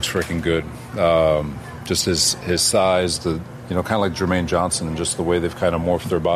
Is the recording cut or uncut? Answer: uncut